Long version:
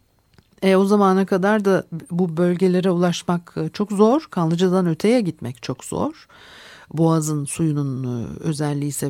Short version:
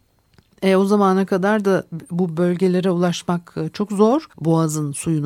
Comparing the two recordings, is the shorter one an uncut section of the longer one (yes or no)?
no